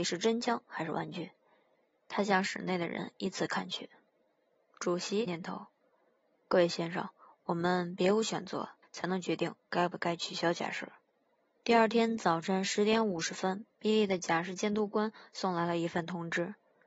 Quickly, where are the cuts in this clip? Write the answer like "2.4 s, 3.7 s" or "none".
5.3 s, 8.8 s